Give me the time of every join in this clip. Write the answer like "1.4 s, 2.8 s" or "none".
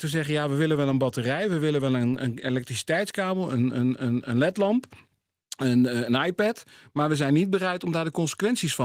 none